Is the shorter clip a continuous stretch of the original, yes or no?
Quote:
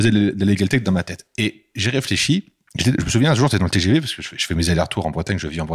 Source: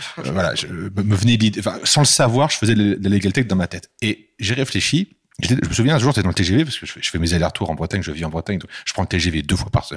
yes